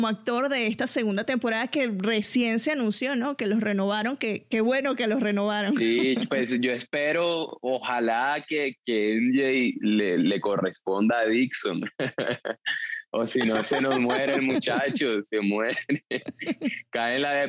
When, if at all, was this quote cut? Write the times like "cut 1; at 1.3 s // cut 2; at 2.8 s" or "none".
none